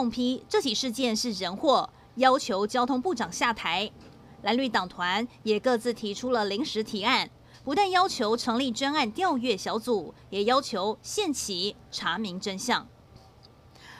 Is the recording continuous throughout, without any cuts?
yes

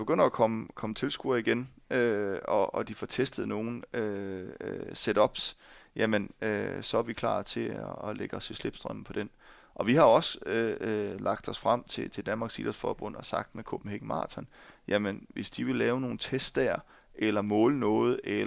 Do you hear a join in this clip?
no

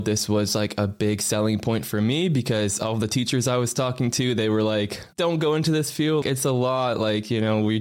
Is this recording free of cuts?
no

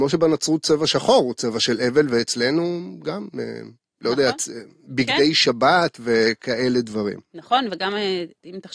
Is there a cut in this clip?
no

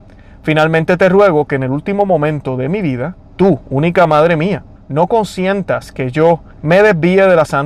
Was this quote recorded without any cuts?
no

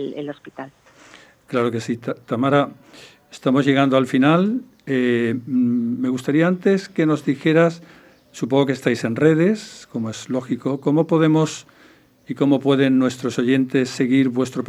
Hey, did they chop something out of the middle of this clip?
no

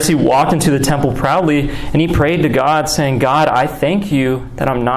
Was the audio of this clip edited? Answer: no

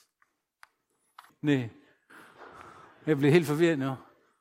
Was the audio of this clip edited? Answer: yes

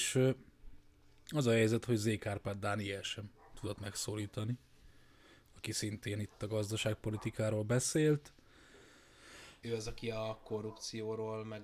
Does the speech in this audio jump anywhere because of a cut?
yes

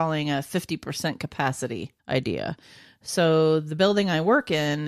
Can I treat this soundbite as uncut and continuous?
no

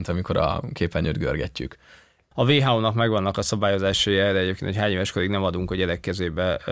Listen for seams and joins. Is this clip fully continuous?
no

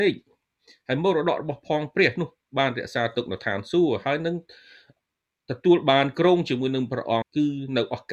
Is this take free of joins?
no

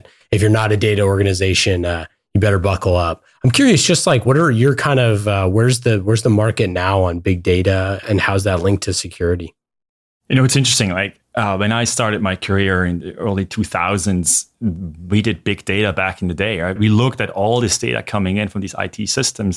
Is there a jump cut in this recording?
yes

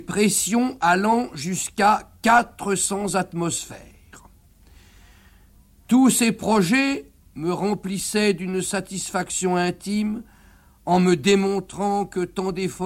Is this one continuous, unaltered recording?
no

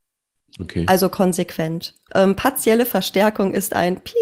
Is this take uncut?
no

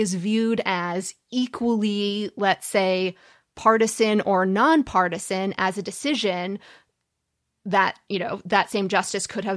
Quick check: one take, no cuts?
yes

